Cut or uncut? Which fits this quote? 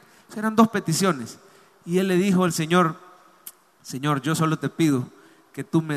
uncut